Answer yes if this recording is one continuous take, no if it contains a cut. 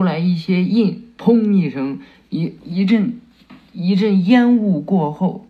no